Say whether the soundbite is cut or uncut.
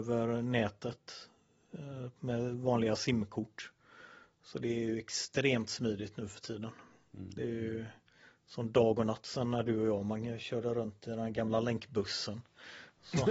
uncut